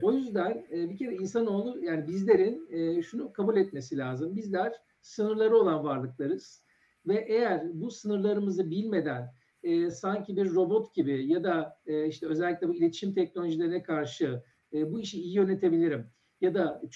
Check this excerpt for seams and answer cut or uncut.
uncut